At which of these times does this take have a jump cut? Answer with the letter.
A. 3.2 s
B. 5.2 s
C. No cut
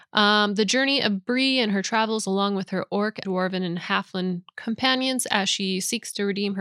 A